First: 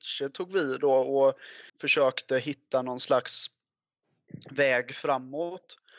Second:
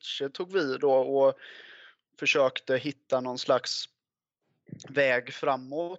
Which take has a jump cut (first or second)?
first